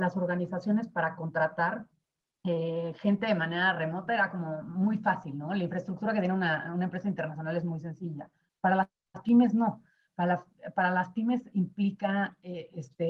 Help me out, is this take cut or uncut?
uncut